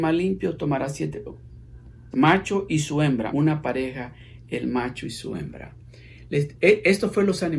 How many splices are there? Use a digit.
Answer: 2